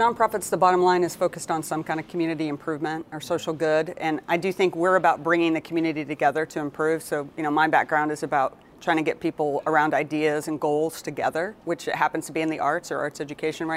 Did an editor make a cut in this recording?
no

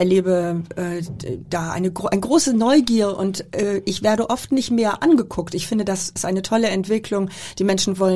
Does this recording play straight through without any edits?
yes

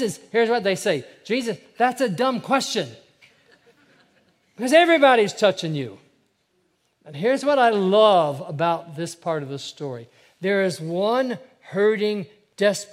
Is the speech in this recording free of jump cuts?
yes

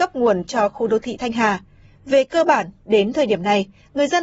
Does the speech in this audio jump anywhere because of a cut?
yes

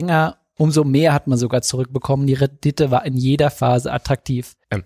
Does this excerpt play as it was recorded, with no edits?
yes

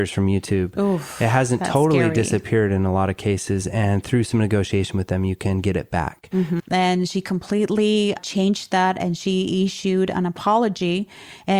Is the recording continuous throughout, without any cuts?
no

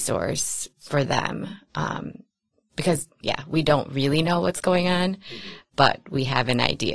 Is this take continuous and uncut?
no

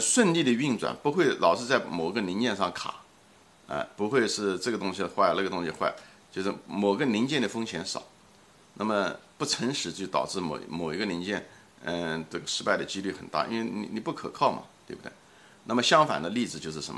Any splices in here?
no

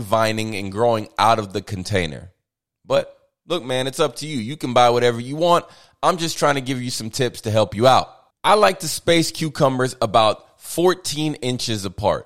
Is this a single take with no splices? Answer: no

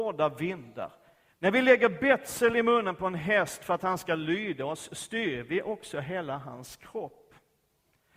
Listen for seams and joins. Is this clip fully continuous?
no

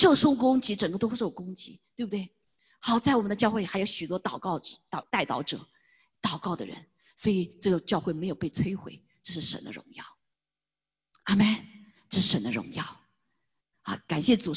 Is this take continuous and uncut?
yes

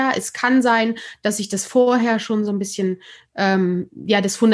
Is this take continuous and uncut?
yes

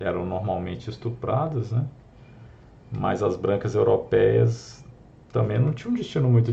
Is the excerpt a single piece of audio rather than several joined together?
yes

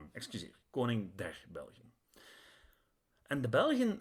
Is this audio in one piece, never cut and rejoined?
yes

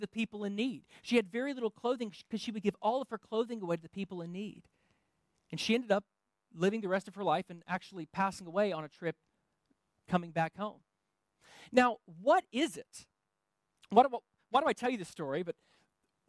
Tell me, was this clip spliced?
no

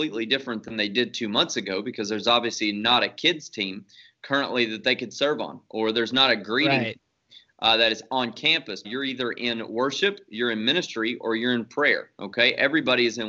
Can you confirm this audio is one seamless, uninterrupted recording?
no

